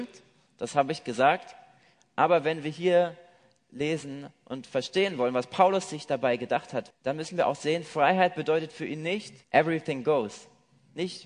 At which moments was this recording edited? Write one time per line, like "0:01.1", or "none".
0:06.9
0:09.4